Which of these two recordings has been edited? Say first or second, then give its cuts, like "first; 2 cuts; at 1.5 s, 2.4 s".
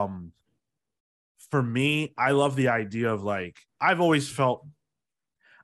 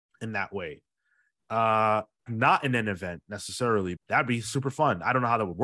second; 2 cuts; at 2.3 s, 4.0 s